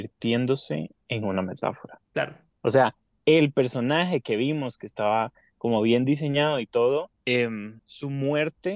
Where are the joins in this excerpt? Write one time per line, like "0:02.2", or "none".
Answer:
0:01.0